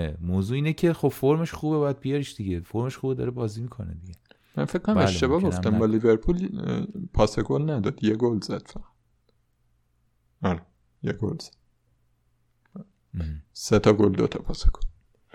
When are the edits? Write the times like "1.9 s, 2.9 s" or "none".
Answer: none